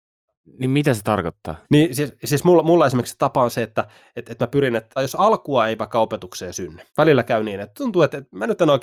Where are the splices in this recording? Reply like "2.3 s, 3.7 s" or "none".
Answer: 1.6 s, 5.0 s, 6.9 s